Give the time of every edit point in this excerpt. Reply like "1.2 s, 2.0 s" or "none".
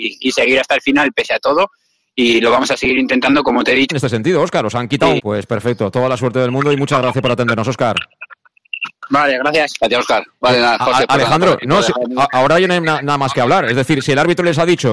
3.9 s, 5.2 s